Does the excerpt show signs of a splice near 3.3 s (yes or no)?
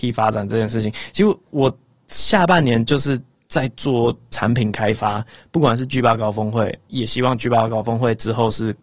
no